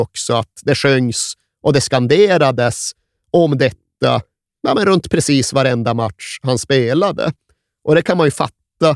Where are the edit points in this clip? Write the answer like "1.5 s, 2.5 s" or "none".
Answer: none